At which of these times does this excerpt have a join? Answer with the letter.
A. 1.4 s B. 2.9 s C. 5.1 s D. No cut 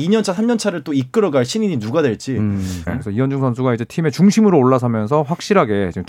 B